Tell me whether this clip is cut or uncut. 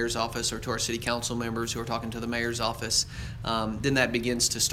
uncut